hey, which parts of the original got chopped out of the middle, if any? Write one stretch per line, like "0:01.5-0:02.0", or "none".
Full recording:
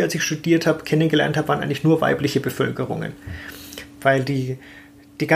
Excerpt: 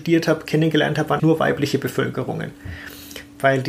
0:01.6-0:01.8